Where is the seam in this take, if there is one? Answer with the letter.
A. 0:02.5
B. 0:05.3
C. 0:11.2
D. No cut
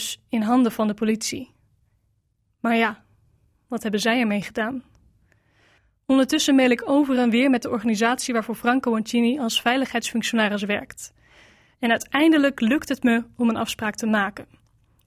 D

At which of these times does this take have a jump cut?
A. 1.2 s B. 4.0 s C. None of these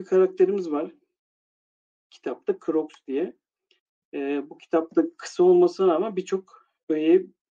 B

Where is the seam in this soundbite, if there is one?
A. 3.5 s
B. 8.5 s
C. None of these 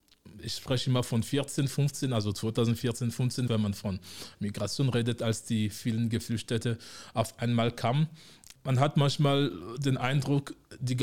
A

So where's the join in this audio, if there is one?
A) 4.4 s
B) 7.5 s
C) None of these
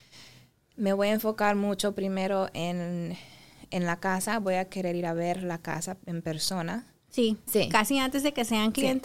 B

